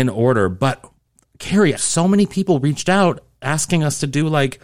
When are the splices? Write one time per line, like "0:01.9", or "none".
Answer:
0:01.8